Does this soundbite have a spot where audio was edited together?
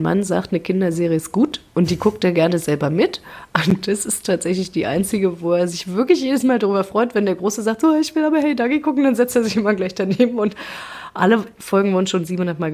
no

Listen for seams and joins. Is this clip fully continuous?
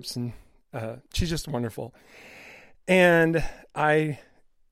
yes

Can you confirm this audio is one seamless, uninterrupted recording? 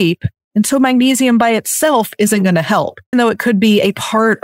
no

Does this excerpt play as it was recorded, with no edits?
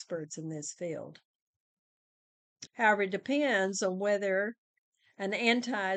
no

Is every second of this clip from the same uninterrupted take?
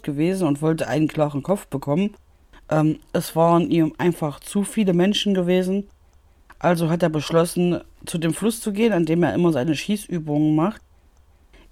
yes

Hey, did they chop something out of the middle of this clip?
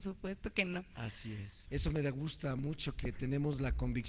yes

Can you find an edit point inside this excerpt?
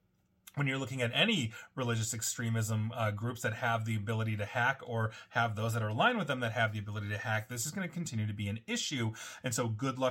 no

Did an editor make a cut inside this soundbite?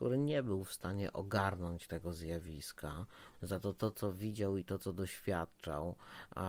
yes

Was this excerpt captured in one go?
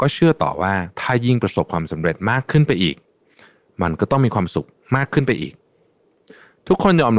yes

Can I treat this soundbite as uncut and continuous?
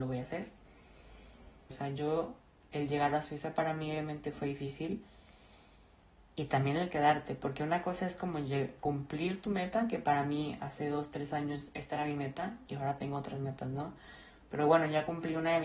no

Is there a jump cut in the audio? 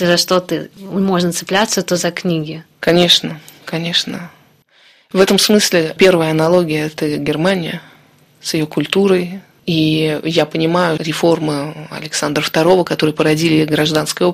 yes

